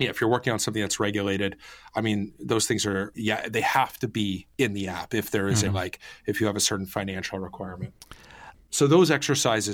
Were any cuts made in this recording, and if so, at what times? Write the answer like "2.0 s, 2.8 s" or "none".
5.7 s, 8.5 s